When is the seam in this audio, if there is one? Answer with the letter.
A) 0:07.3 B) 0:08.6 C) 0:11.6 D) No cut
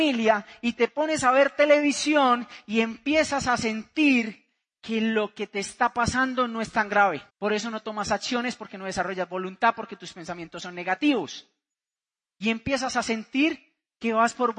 A